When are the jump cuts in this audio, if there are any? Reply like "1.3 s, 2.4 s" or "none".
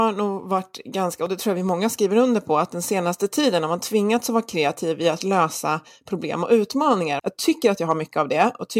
7.2 s